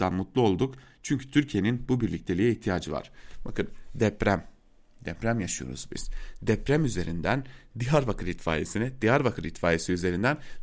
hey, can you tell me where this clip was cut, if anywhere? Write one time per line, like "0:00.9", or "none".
none